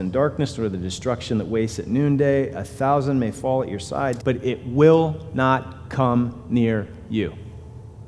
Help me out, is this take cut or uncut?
cut